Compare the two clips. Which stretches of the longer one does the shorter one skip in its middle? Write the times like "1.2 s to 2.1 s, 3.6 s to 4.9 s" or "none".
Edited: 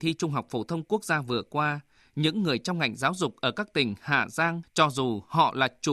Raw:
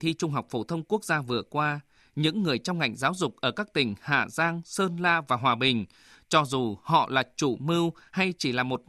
4.6 s to 6.2 s